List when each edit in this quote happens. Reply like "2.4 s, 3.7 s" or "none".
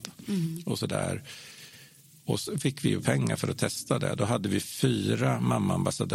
none